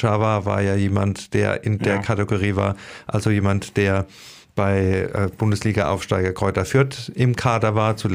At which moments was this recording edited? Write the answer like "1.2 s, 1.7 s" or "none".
none